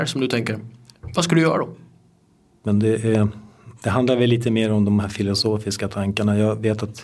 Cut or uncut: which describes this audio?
cut